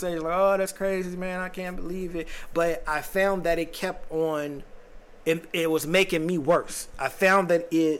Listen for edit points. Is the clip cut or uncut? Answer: uncut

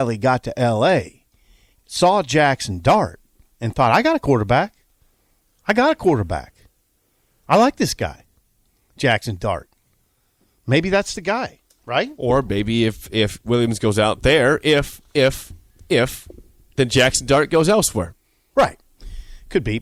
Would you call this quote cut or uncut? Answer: uncut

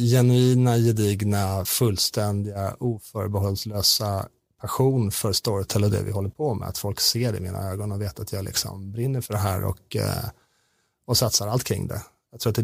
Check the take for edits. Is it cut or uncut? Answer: uncut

